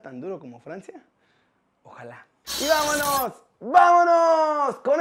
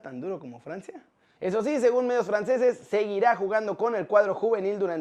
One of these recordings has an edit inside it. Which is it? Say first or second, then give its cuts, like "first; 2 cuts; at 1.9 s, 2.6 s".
second; 1 cut; at 1.4 s